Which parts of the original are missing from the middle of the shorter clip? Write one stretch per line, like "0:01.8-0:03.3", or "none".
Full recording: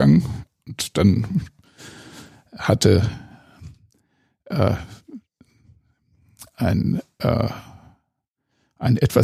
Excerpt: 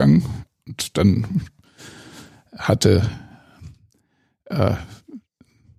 none